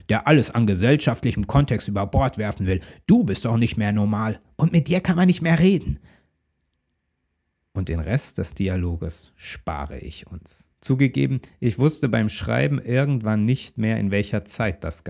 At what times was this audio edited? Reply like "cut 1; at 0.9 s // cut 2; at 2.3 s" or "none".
cut 1; at 10.7 s